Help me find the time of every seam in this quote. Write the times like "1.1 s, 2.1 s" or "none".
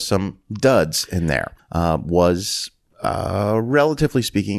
1.6 s